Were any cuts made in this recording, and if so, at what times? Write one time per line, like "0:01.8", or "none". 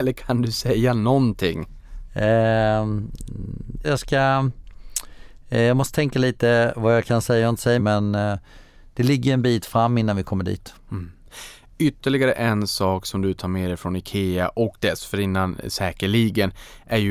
0:03.8
0:07.8